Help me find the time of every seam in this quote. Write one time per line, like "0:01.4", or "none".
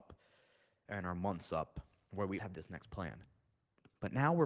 0:02.4